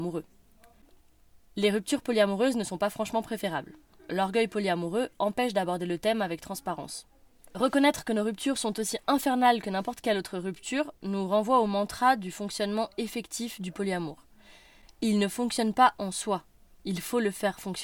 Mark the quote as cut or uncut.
uncut